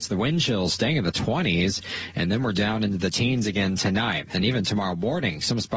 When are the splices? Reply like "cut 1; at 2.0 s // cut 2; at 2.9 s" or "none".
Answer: none